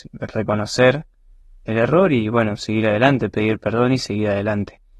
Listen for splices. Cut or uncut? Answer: uncut